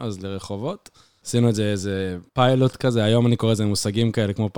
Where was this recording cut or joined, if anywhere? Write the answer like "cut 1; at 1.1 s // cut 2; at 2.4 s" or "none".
cut 1; at 2.3 s